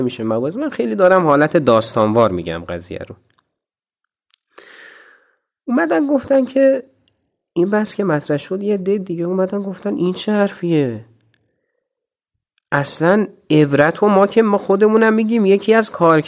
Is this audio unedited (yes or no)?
yes